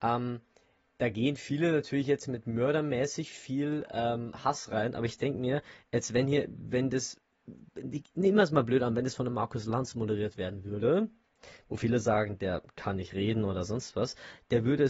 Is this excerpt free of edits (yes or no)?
yes